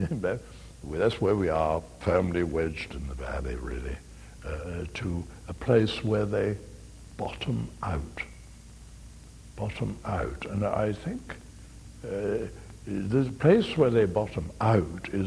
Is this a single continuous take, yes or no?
no